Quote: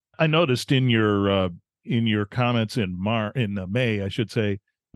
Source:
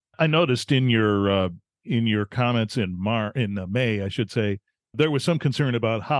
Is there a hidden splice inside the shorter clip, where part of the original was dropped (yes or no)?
no